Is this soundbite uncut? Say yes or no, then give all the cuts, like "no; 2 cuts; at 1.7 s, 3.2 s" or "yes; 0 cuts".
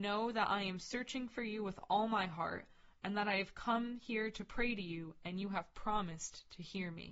yes; 0 cuts